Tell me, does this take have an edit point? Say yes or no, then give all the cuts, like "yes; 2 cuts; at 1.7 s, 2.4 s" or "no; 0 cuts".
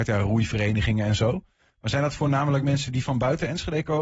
no; 0 cuts